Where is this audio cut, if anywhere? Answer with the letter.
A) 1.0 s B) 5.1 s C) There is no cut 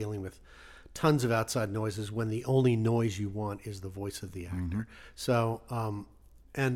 B